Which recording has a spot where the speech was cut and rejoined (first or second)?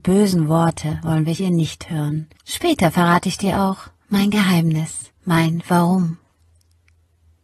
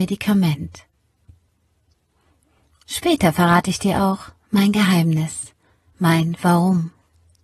first